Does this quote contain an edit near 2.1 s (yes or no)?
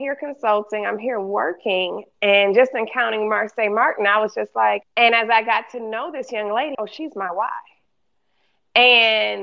no